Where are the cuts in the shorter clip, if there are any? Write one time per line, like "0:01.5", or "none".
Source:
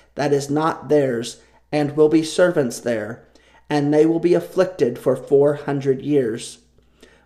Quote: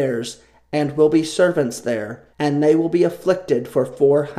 0:02.3

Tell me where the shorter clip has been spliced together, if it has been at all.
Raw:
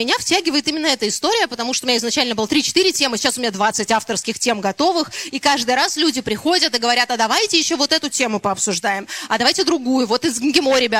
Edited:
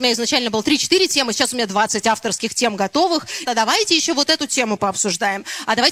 0:03.4

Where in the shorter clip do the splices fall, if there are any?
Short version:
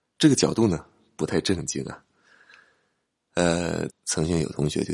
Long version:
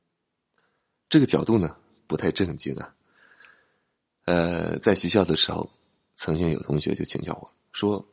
0:03.9

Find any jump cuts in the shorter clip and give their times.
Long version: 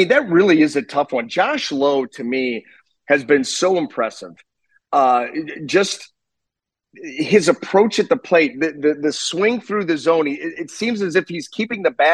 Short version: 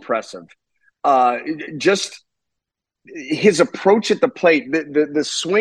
none

